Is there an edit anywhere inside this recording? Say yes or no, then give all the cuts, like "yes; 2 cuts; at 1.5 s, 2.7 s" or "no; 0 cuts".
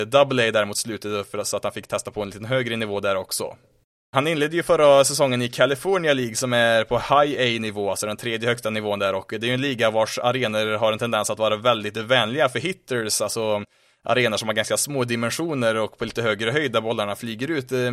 yes; 1 cut; at 4.1 s